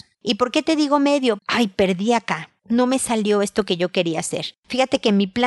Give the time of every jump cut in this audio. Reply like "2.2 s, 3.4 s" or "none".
1.4 s